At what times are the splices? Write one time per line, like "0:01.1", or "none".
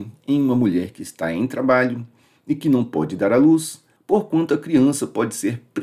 0:04.0